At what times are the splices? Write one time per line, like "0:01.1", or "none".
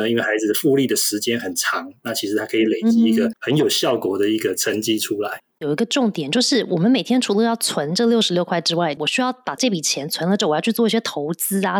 0:09.0